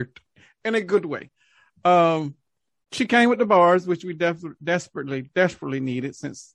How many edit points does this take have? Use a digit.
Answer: 0